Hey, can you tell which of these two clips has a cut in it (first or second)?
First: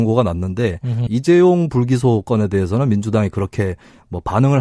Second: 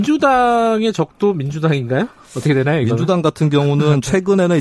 first